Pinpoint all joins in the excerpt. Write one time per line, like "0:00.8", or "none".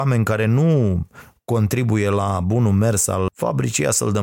0:03.3